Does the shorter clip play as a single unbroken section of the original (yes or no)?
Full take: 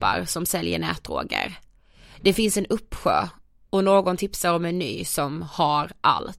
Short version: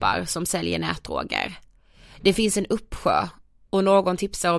yes